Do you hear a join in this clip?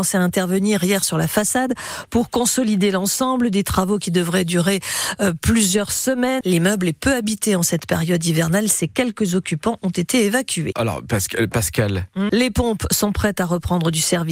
yes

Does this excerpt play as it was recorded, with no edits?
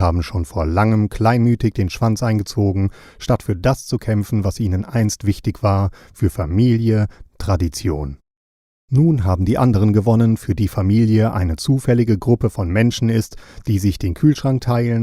no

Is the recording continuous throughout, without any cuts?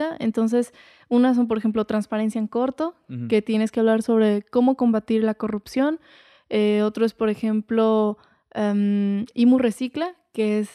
yes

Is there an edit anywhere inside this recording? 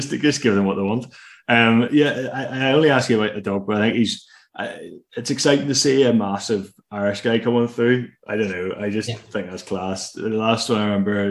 no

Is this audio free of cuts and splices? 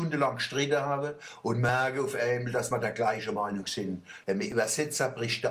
no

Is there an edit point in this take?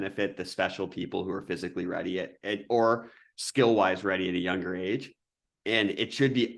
no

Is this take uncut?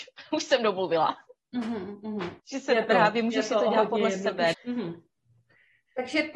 no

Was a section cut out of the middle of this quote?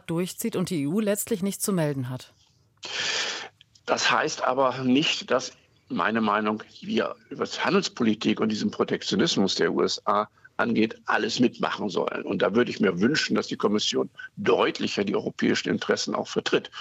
yes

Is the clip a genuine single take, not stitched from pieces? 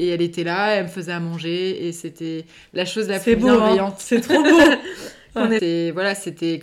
no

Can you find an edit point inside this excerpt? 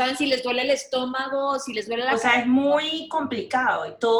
no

